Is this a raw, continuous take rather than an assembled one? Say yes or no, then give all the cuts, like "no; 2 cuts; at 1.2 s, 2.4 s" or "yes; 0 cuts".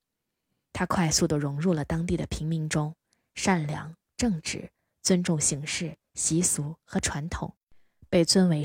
yes; 0 cuts